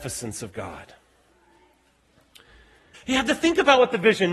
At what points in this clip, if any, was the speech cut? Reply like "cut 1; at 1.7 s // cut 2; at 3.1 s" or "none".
cut 1; at 2.9 s